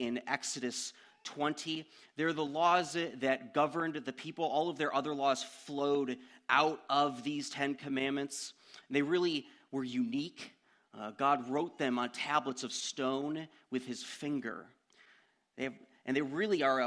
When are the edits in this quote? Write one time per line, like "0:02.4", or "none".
none